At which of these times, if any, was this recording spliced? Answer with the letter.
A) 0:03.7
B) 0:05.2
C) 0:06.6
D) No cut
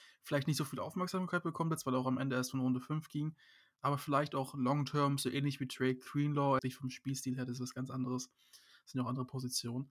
C